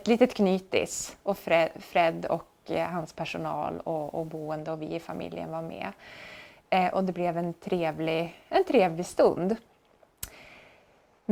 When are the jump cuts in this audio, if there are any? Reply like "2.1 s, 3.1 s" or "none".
none